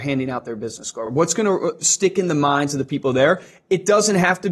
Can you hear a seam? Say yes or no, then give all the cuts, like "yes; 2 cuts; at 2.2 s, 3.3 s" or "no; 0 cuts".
no; 0 cuts